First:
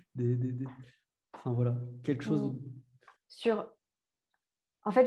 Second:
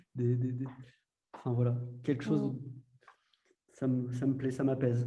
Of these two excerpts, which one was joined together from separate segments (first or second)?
first